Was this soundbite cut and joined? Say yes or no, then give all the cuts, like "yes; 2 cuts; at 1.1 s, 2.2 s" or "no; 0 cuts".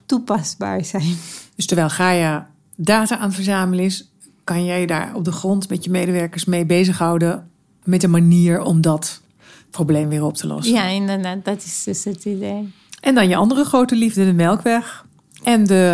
no; 0 cuts